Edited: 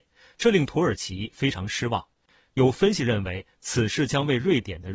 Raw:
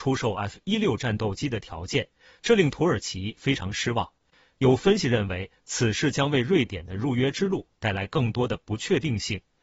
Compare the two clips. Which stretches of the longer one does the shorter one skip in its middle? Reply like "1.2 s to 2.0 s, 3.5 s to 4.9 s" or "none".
none